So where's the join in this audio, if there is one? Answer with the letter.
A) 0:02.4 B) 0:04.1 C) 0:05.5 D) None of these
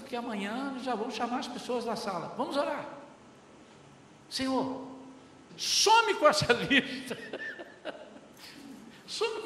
C